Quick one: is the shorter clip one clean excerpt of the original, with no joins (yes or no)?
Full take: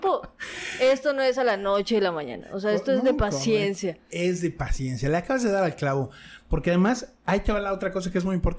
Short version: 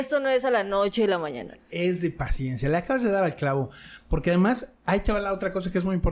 no